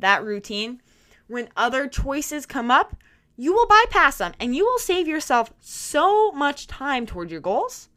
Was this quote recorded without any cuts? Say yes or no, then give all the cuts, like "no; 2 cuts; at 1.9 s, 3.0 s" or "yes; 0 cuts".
yes; 0 cuts